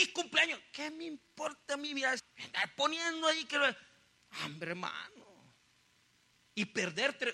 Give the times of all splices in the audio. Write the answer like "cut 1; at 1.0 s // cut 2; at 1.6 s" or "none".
cut 1; at 2.2 s

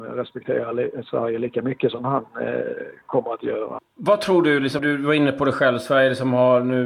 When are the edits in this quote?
cut 1; at 3.8 s // cut 2; at 4.8 s

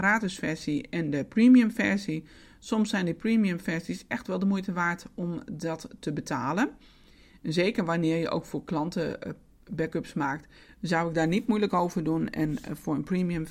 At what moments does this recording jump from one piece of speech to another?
none

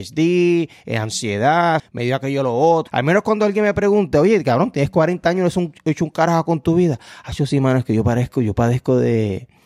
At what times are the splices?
cut 1; at 1.8 s // cut 2; at 2.9 s

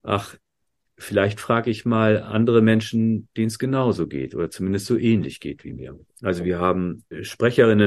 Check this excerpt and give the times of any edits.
cut 1; at 6.1 s

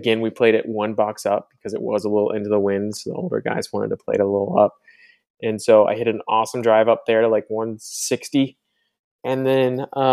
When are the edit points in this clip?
none

